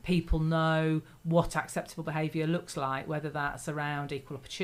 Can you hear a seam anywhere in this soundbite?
no; 0 cuts

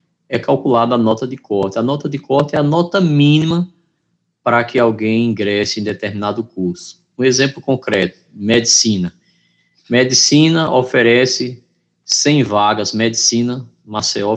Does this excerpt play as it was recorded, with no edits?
yes; 0 cuts

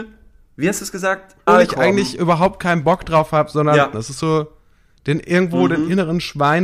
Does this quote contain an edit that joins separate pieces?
yes; 2 cuts; at 1.5 s, 3.9 s

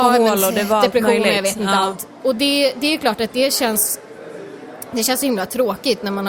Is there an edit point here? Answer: no; 0 cuts

